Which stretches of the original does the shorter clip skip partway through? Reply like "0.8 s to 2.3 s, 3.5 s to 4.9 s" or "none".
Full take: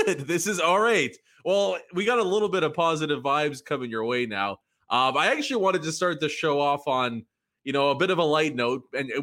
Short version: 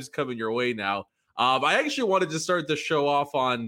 none